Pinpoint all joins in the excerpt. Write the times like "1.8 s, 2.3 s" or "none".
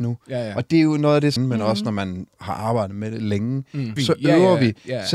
1.4 s, 4.0 s